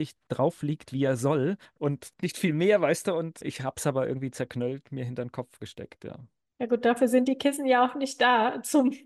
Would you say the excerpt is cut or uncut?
uncut